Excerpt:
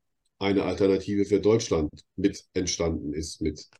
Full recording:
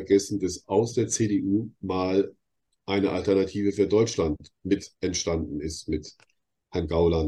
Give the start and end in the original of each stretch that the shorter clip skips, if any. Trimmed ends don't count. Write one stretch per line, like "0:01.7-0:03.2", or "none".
none

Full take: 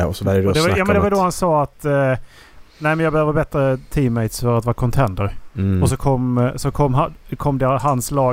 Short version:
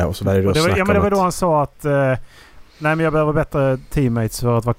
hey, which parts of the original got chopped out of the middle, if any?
none

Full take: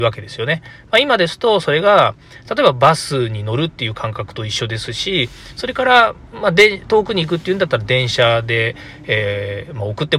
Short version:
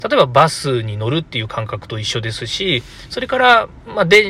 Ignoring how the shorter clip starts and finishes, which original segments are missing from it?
none

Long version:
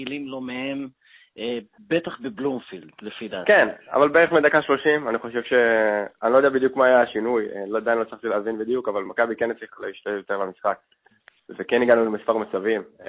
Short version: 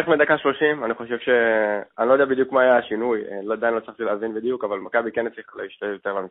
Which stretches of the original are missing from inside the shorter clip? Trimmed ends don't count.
none

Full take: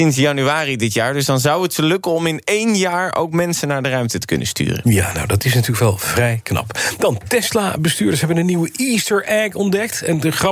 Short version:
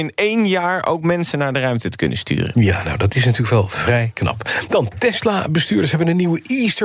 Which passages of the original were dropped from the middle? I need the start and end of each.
none

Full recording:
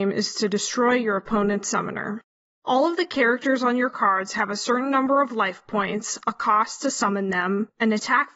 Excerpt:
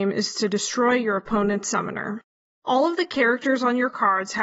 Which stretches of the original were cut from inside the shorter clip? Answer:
none

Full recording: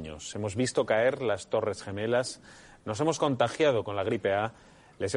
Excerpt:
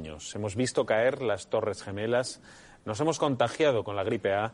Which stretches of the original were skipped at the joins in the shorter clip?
none

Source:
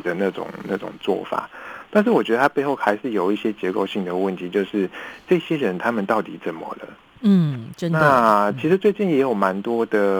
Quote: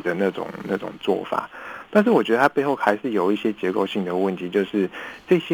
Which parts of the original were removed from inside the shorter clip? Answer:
none

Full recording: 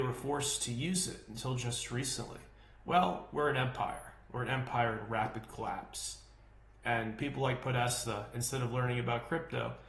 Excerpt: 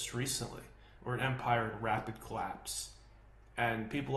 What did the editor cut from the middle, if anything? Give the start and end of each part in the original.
0:02.7-0:04.3

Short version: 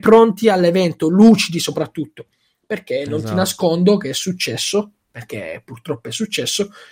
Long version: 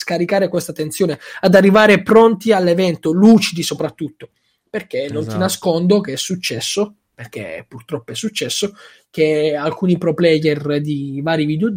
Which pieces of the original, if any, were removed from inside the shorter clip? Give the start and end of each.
none

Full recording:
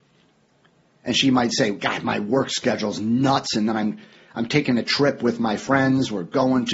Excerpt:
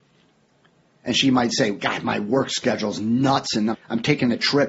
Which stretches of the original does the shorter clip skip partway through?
0:03.7-0:04.2

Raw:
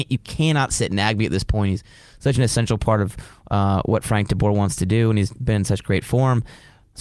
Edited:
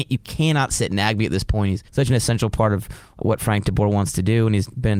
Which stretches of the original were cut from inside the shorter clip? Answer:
0:01.9-0:02.2
0:03.5-0:03.8

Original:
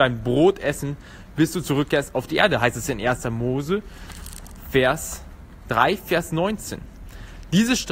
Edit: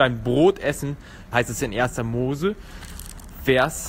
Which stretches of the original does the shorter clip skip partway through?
0:01.3-0:02.6

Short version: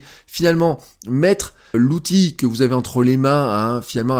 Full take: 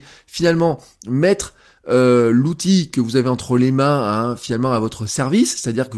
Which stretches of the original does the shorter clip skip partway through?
0:01.7-0:02.3

